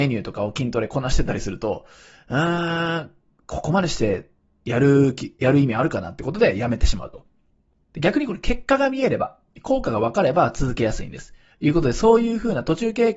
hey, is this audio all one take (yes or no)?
no